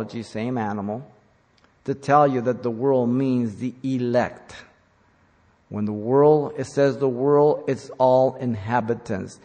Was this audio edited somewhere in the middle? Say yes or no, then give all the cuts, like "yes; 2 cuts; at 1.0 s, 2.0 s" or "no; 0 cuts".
no; 0 cuts